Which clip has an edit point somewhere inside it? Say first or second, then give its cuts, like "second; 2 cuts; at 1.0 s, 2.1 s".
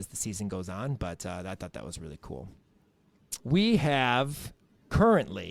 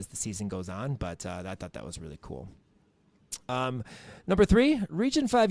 first; 1 cut; at 3.4 s